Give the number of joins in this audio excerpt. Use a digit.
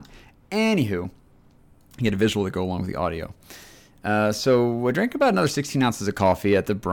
0